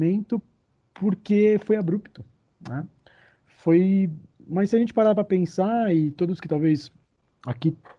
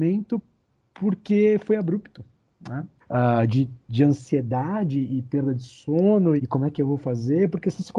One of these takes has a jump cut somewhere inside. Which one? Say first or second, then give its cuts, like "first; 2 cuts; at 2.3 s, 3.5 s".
second; 2 cuts; at 3.0 s, 6.4 s